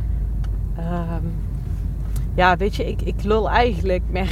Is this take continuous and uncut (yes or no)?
yes